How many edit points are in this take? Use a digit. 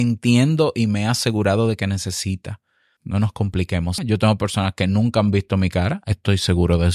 2